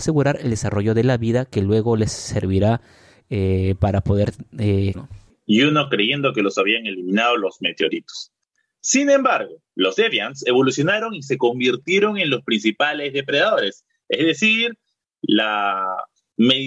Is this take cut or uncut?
cut